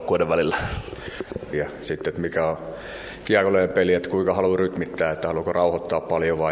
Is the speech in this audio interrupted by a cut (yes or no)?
yes